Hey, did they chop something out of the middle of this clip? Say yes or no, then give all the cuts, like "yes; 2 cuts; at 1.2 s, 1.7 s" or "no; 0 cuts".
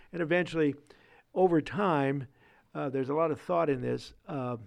no; 0 cuts